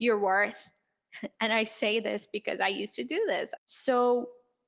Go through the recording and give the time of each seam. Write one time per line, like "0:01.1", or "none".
0:03.6